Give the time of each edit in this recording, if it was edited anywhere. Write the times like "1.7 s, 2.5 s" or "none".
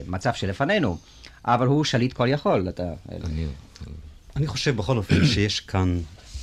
none